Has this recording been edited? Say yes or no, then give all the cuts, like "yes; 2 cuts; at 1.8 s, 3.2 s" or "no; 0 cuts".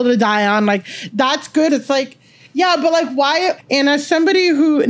yes; 2 cuts; at 1.7 s, 3.6 s